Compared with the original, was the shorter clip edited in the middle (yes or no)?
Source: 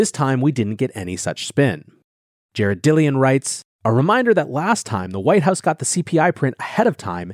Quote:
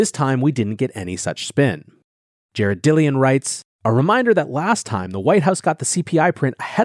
no